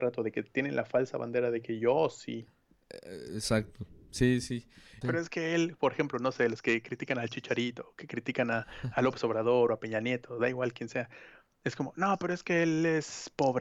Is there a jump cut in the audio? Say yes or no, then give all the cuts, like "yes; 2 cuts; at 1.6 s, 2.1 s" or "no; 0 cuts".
yes; 1 cut; at 5.0 s